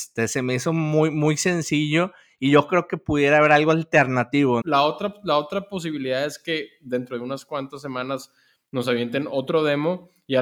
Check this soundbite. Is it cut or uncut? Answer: cut